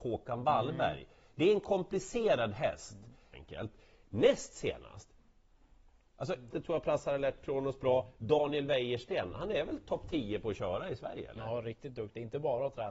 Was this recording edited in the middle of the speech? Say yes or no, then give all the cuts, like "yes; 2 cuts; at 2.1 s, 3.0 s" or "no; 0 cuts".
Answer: yes; 2 cuts; at 3.3 s, 6.5 s